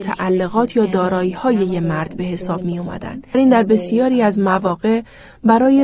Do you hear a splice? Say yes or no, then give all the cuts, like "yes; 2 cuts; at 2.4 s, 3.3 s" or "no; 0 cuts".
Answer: yes; 1 cut; at 3.3 s